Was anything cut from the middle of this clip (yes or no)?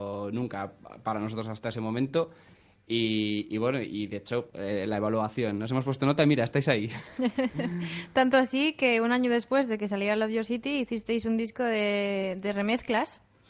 yes